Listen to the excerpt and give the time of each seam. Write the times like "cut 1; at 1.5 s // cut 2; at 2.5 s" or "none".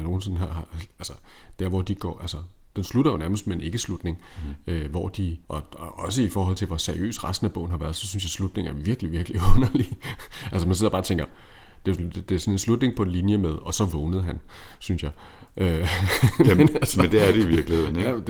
cut 1; at 5.4 s